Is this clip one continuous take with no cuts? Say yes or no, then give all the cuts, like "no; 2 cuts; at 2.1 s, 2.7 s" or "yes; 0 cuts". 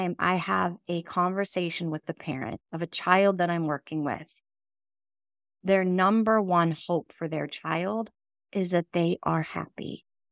no; 1 cut; at 2.7 s